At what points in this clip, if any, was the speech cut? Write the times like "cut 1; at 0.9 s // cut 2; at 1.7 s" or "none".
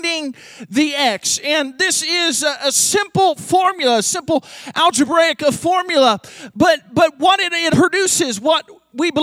cut 1; at 7.7 s